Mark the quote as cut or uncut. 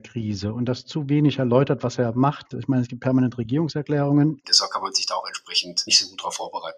cut